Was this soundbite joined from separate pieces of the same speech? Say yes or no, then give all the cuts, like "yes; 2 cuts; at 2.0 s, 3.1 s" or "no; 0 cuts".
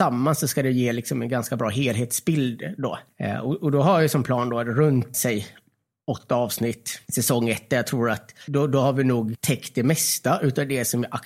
yes; 1 cut; at 5.1 s